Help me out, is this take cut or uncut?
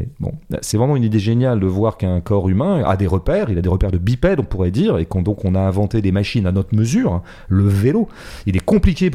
uncut